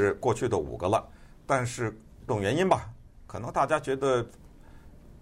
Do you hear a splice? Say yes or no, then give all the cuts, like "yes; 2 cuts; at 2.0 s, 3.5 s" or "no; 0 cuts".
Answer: yes; 1 cut; at 2.3 s